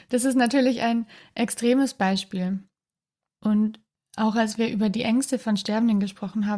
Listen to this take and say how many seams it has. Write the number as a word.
one